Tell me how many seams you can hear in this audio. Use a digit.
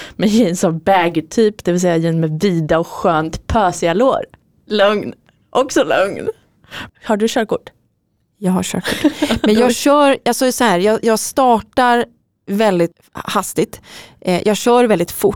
1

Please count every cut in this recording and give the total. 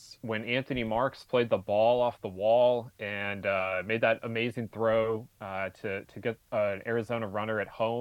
0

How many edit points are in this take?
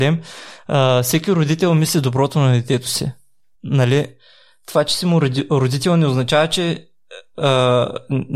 1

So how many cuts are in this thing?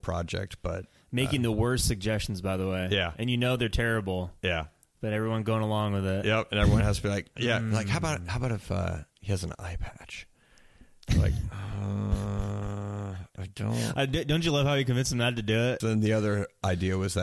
2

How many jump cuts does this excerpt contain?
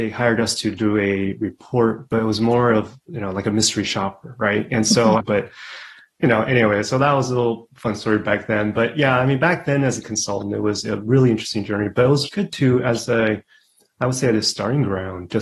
1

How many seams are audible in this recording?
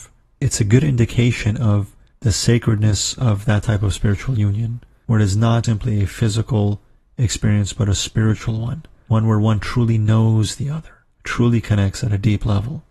1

